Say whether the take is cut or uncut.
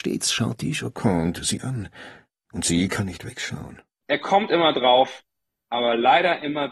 cut